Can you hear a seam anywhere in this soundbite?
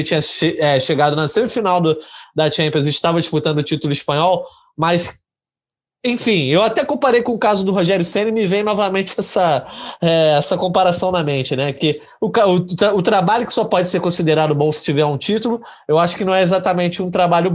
no; 0 cuts

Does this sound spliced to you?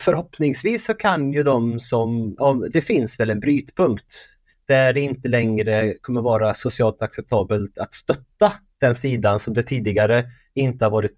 yes; 1 cut; at 2.4 s

